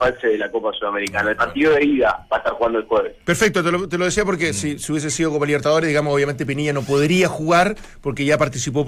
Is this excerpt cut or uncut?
uncut